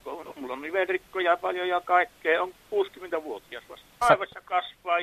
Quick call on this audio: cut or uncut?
cut